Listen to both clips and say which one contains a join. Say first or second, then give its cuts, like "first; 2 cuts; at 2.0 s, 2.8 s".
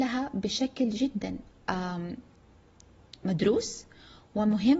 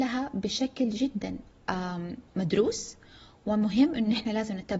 second; 1 cut; at 2.3 s